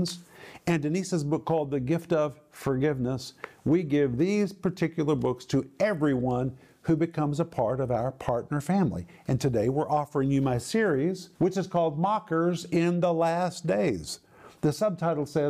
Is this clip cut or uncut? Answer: cut